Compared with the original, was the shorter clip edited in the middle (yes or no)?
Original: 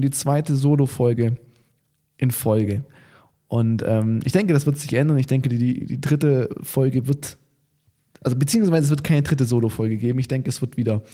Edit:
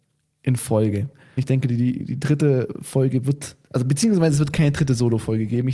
yes